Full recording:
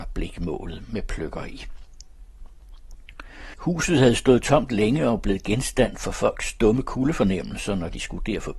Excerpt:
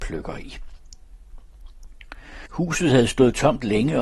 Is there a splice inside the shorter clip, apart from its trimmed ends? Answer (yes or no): no